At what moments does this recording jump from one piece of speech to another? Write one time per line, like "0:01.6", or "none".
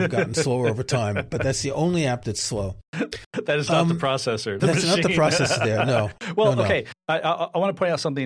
0:04.6